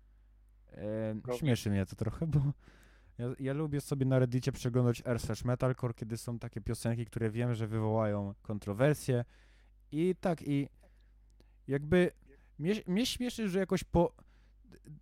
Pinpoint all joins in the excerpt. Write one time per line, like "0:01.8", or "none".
0:01.2